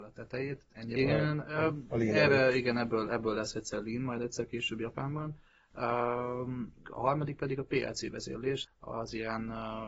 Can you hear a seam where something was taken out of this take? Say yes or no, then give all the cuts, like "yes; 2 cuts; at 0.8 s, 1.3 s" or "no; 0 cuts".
yes; 3 cuts; at 1.0 s, 6.8 s, 8.6 s